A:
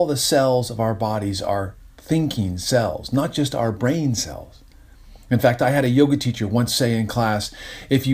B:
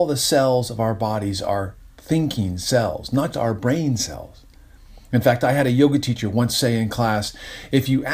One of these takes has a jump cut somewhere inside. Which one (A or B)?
B